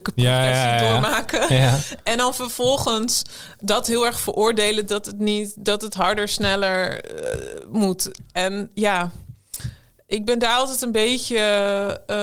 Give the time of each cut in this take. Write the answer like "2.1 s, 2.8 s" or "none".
3.6 s